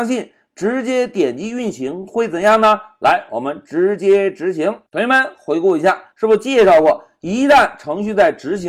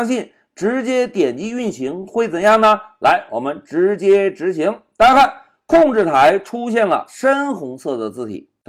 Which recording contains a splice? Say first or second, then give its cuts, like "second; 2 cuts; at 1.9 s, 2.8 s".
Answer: first; 2 cuts; at 4.9 s, 6.1 s